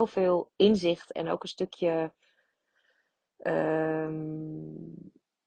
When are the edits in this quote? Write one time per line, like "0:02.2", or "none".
none